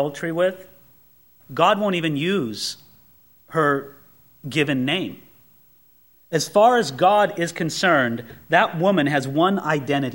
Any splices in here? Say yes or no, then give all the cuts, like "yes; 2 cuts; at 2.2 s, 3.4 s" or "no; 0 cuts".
yes; 1 cut; at 1.4 s